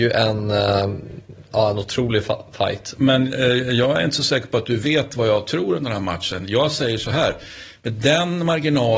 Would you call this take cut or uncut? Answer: cut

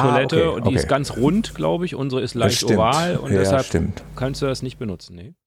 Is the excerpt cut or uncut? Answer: uncut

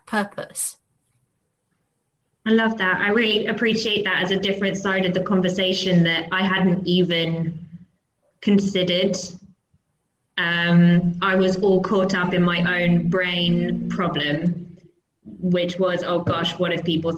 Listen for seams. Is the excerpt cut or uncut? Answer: cut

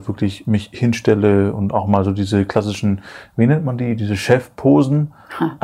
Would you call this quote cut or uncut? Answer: uncut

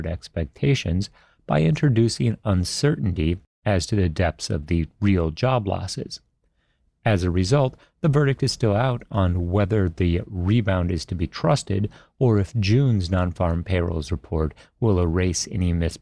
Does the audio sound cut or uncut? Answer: uncut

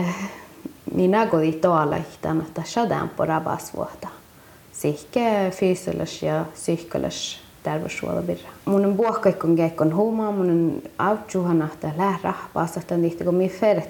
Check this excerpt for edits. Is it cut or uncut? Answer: cut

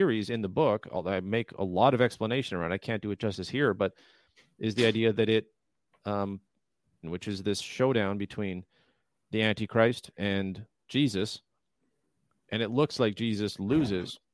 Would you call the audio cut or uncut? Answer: cut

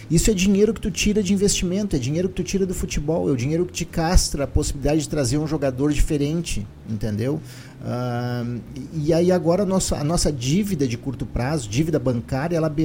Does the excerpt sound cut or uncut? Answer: uncut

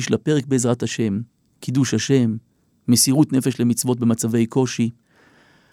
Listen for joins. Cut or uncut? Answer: uncut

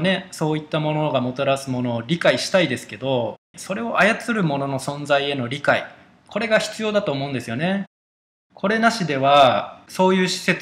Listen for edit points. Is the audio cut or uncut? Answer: cut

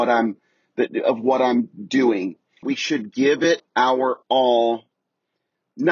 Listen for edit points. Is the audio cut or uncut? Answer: cut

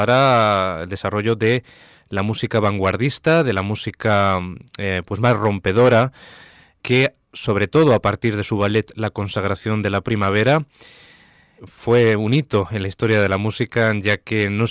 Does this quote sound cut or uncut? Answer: cut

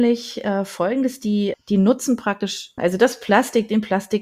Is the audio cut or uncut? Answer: cut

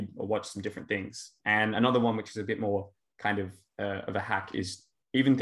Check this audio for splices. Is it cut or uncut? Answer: uncut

